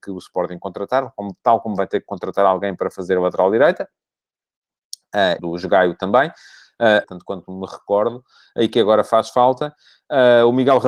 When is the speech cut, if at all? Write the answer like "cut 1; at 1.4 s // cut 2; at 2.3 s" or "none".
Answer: cut 1; at 5.4 s // cut 2; at 7.0 s